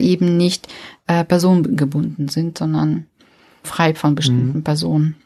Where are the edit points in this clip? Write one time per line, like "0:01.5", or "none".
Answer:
0:03.6